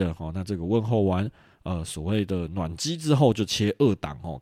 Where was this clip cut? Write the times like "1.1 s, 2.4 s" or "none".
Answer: none